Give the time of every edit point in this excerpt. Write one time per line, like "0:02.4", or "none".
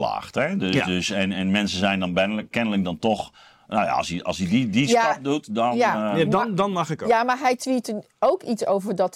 none